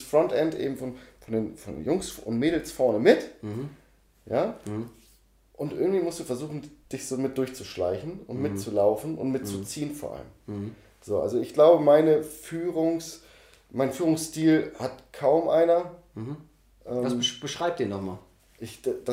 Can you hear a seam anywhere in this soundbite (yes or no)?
no